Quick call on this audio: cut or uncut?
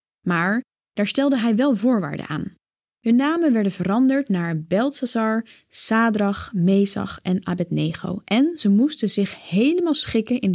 uncut